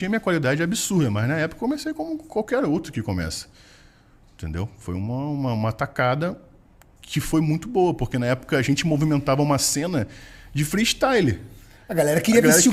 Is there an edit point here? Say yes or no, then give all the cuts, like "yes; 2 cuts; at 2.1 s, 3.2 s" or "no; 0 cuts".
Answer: no; 0 cuts